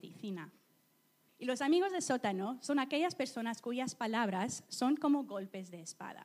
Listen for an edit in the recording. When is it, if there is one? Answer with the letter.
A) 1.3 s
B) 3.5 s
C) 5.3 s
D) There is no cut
A